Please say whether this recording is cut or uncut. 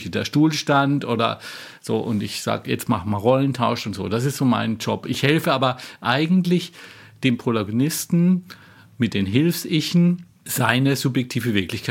uncut